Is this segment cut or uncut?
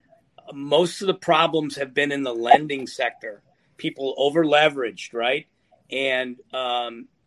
uncut